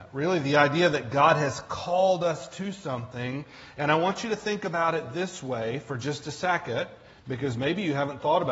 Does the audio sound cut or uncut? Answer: uncut